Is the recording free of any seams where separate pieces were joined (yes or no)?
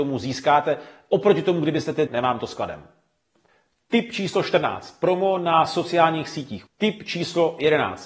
no